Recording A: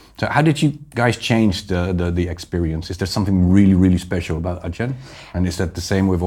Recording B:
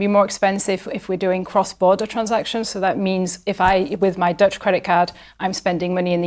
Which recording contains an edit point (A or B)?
A